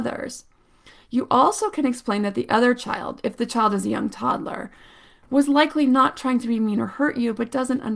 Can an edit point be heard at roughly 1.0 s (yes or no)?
no